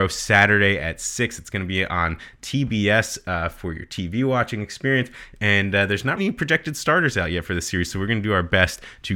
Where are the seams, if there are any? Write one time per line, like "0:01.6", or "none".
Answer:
0:06.2